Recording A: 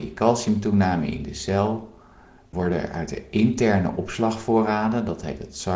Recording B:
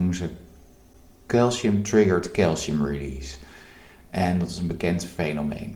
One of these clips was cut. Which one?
A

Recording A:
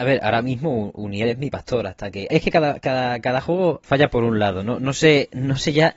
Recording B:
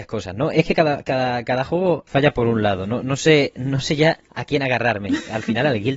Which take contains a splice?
A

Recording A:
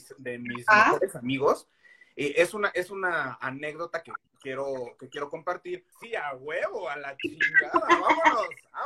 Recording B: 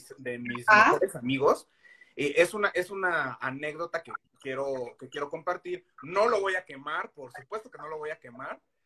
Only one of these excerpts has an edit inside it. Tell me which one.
A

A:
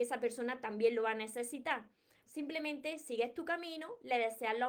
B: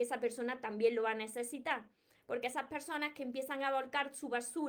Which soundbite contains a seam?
A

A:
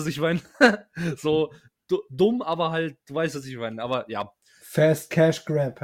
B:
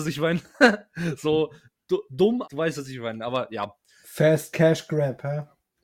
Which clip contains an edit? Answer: B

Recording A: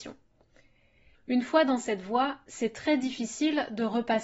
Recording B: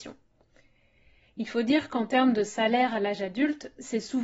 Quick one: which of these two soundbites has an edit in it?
A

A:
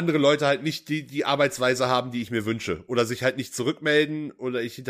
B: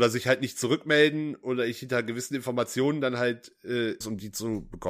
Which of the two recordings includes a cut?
B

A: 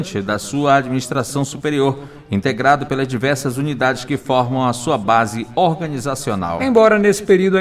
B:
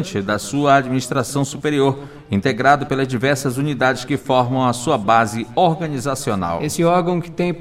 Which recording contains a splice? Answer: A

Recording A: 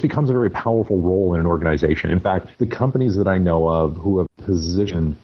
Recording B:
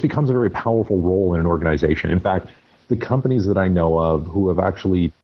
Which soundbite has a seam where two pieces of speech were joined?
A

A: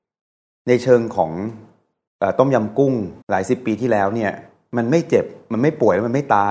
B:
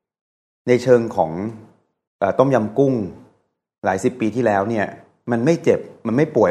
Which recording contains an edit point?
A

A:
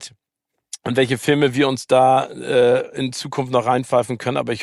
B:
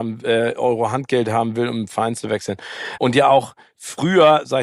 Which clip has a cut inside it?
B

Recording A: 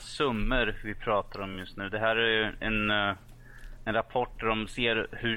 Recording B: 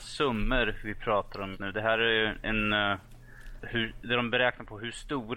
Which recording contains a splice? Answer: B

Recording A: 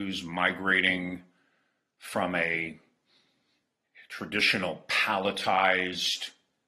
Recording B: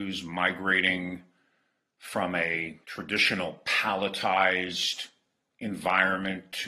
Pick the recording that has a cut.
B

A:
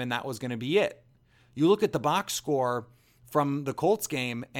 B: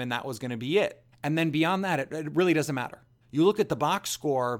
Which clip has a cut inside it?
B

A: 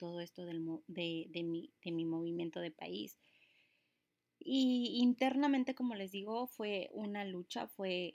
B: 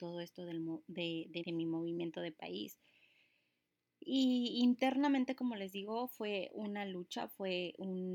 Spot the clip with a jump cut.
B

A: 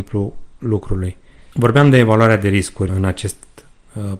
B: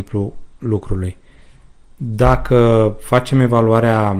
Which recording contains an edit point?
A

